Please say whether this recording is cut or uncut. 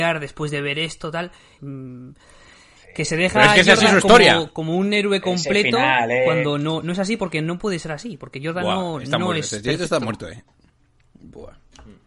cut